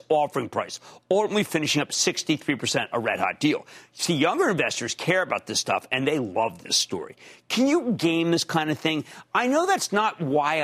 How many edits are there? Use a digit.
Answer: 0